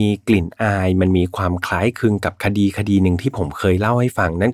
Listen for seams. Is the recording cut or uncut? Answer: uncut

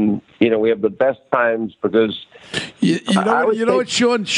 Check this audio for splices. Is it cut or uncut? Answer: uncut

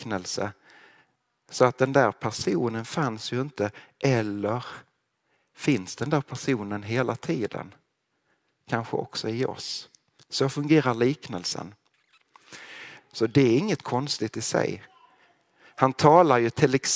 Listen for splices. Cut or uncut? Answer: cut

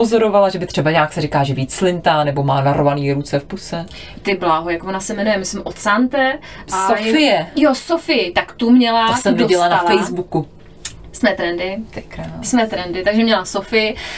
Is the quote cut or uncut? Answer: cut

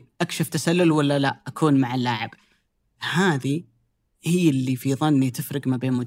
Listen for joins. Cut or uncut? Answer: uncut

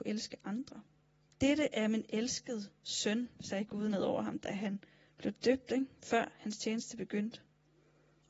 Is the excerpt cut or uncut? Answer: cut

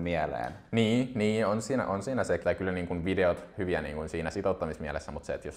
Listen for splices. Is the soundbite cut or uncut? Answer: cut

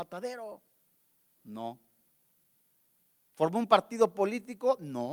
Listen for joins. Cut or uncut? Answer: cut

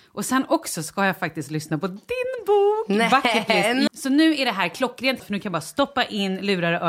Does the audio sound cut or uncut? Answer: cut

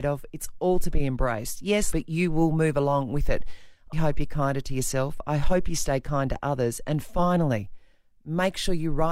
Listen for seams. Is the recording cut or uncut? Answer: cut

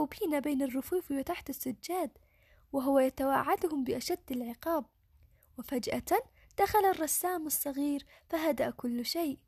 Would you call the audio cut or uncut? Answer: uncut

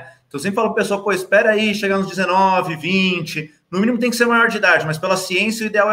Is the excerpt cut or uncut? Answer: uncut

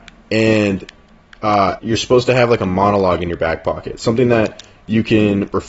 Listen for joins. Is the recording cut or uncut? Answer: cut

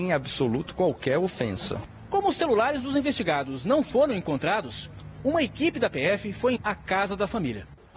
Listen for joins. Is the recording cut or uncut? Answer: cut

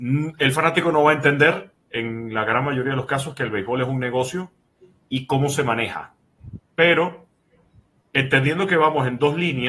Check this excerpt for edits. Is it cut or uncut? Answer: uncut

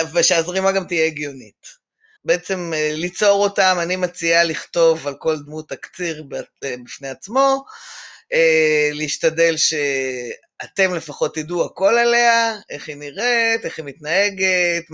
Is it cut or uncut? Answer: cut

